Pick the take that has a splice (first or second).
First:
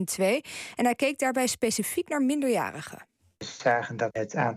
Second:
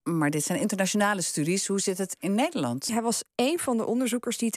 second